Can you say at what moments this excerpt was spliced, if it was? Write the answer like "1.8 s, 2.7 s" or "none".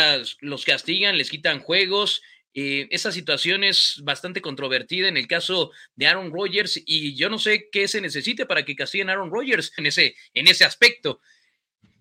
9.8 s